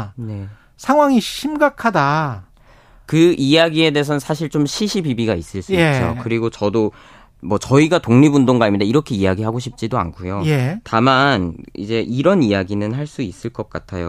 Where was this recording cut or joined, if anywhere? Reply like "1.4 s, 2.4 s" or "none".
none